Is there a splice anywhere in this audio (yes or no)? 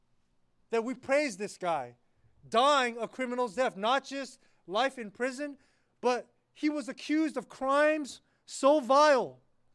no